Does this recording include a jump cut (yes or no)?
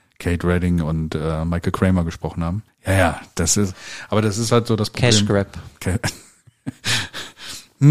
yes